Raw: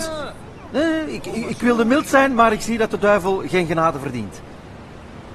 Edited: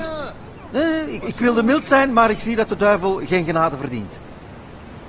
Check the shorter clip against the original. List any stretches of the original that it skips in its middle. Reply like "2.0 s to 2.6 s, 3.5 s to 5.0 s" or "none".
1.2 s to 1.4 s